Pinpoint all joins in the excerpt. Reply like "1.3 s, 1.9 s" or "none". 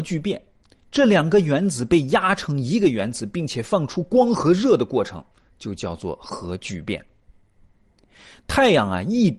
none